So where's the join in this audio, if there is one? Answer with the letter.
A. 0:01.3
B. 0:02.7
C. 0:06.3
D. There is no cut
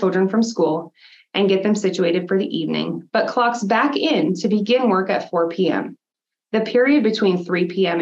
D